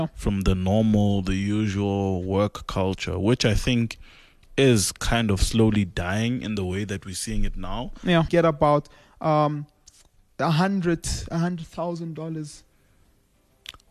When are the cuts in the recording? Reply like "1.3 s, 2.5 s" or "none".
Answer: 8.3 s